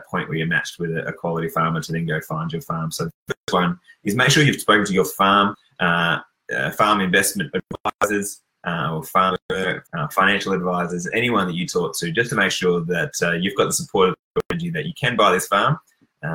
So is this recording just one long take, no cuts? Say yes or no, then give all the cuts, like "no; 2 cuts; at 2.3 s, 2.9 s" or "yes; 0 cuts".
no; 1 cut; at 9.9 s